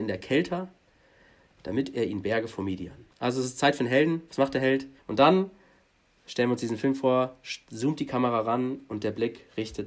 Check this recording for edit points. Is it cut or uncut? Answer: cut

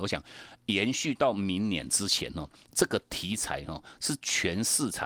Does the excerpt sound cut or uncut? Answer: uncut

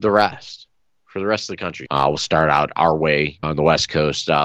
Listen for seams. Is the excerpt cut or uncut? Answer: cut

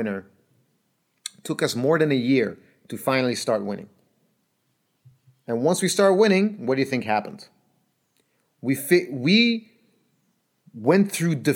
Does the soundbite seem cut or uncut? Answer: uncut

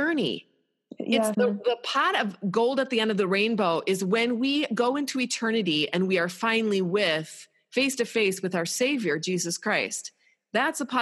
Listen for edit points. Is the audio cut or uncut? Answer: cut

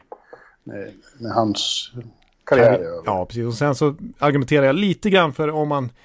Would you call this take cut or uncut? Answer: uncut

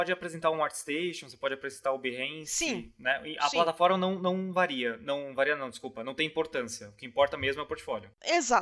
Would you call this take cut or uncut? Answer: uncut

